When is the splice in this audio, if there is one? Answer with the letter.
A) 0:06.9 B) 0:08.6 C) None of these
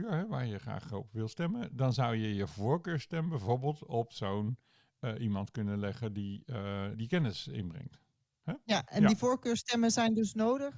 A